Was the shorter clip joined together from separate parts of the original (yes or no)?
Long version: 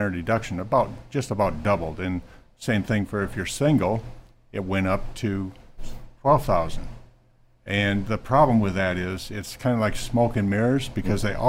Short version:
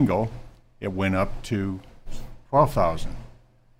no